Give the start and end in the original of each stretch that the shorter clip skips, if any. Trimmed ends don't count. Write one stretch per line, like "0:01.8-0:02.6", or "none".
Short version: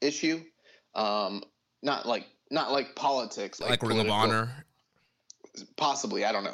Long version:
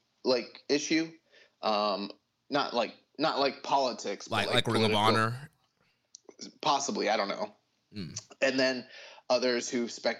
0:04.3-0:04.5

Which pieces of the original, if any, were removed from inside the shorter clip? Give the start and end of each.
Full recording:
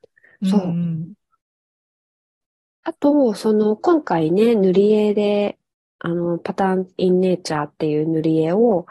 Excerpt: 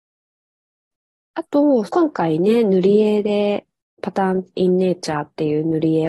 0:03.4-0:03.8
0:05.9-0:06.4

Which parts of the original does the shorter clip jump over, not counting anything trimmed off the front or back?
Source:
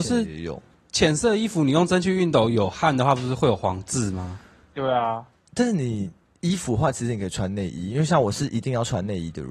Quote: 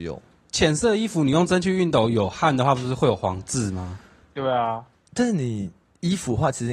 none

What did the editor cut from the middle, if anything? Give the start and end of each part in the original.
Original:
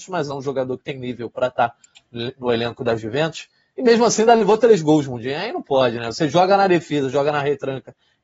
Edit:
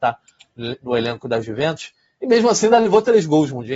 none

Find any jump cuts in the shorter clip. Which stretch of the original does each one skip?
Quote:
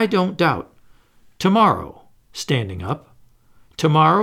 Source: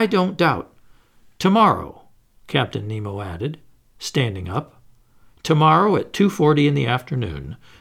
0:02.2-0:03.9

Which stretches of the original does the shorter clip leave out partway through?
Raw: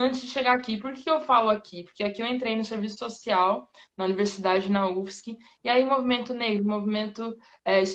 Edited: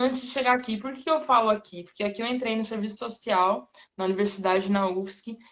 none

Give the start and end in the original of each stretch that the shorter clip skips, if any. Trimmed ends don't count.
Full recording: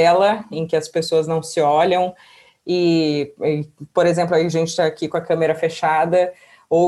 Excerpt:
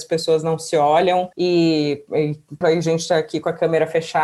0:02.2-0:02.6
0:03.9-0:04.3

